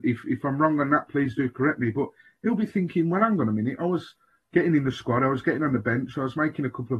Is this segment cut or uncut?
uncut